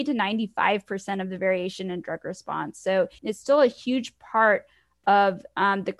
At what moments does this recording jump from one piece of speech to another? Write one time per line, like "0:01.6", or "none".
0:03.2